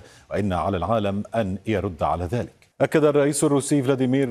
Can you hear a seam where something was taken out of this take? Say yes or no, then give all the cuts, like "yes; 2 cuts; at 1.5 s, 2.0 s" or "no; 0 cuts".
yes; 1 cut; at 2.7 s